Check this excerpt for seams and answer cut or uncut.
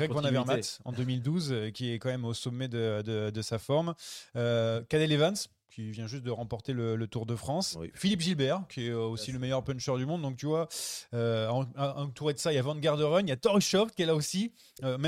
uncut